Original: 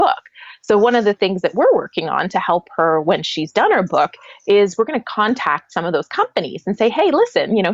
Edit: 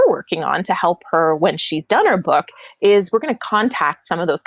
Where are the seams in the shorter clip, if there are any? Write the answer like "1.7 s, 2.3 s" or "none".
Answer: none